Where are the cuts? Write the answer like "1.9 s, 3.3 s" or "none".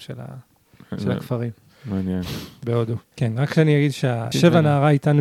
3.1 s, 4.3 s